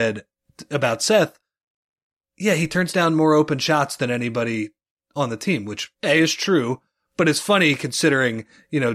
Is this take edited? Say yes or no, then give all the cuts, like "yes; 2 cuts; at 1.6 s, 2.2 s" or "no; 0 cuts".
yes; 1 cut; at 5.9 s